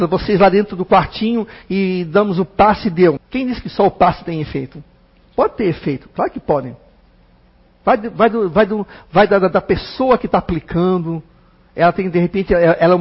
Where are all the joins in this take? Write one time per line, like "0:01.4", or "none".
0:03.2